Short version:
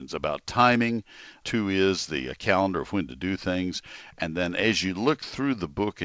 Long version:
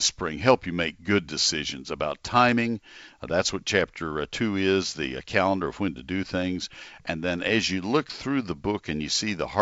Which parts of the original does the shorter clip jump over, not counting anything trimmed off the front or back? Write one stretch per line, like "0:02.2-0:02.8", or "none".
0:03.2-0:04.3